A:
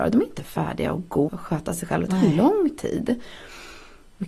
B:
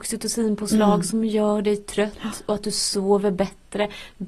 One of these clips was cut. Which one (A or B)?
A